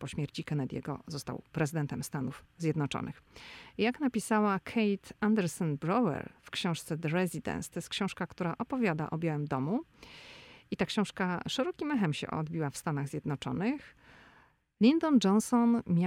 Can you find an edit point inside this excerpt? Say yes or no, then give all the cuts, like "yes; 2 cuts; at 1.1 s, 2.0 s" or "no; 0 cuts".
no; 0 cuts